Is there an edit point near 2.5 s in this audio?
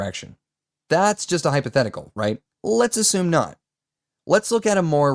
yes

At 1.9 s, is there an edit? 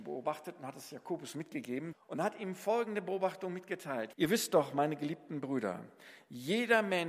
yes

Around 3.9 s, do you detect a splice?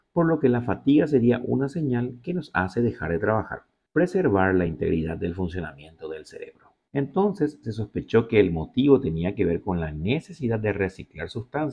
yes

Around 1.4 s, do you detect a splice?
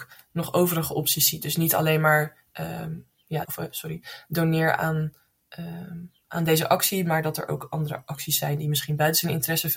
no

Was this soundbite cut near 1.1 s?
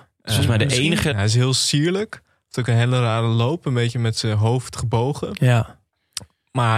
yes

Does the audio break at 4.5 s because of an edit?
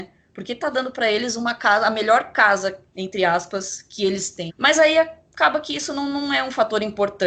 yes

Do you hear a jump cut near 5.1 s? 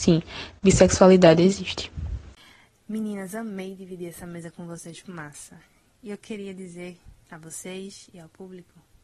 yes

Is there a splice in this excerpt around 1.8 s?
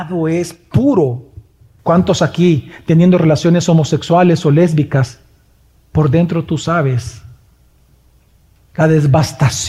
yes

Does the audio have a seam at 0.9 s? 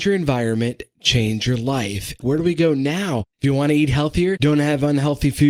no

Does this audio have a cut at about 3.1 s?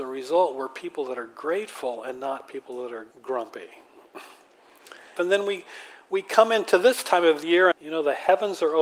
yes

